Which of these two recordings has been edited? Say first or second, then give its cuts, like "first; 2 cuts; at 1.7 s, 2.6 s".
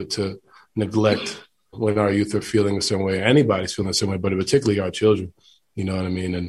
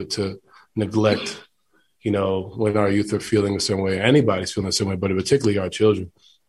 first; 1 cut; at 1.7 s